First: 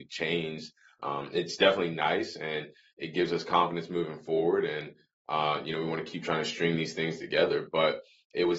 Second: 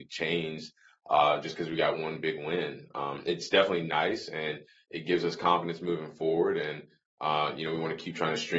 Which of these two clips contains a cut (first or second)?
first